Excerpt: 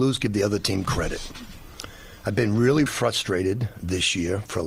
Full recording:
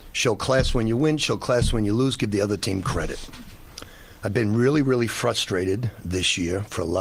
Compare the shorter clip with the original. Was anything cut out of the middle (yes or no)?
yes